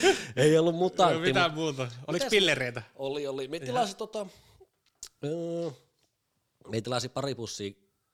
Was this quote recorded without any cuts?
yes; 0 cuts

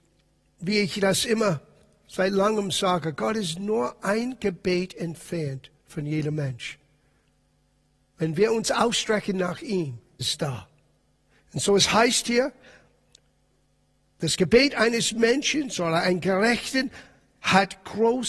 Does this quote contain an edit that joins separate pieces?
yes; 1 cut; at 10.2 s

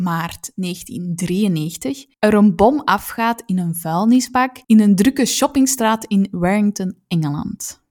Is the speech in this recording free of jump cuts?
no; 2 cuts; at 2.1 s, 4.6 s

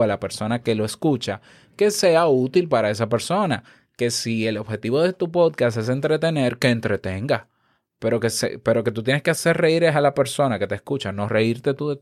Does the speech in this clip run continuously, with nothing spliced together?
yes; 0 cuts

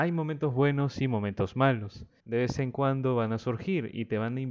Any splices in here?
yes; 1 cut; at 2.2 s

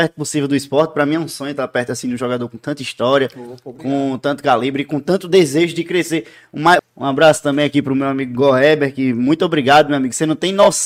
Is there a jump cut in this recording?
yes; 1 cut; at 6.8 s

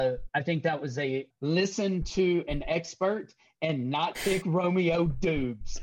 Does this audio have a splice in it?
yes; 1 cut; at 1.3 s

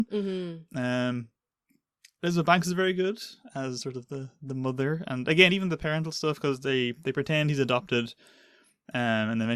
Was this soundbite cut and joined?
no; 0 cuts

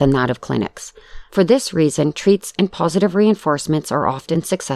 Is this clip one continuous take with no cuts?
no; 1 cut; at 1.3 s

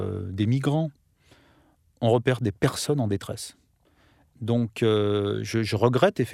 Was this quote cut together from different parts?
yes; 1 cut; at 4.3 s

